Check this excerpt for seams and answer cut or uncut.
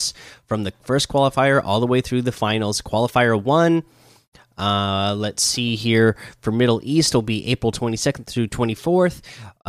uncut